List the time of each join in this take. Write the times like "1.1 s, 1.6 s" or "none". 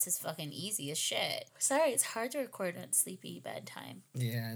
1.5 s